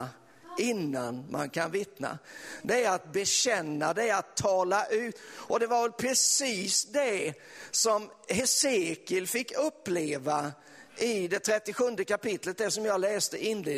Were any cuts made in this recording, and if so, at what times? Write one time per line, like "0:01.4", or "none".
none